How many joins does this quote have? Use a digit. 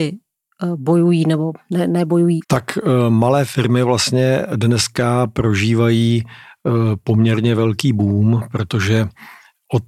1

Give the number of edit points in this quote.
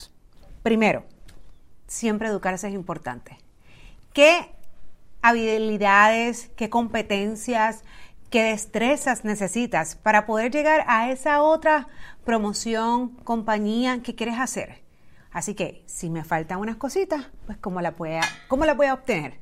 0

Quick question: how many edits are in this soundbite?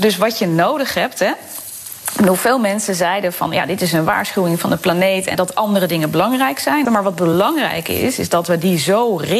2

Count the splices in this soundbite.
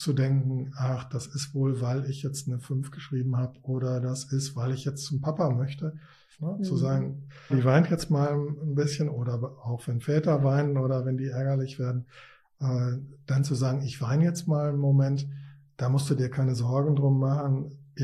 2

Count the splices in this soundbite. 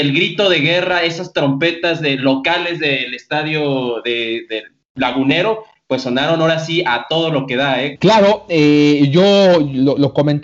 1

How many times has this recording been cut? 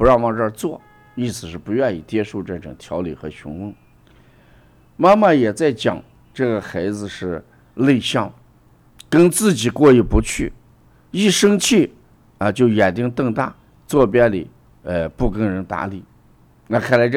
0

